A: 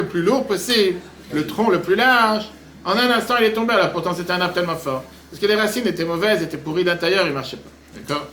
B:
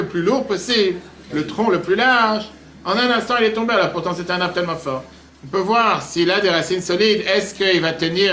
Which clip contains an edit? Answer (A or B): B